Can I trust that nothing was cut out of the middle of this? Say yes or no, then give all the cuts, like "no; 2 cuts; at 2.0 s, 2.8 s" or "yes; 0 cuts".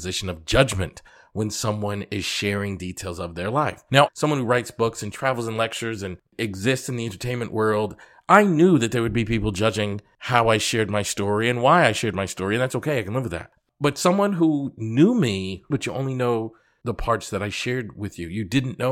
no; 2 cuts; at 4.1 s, 15.7 s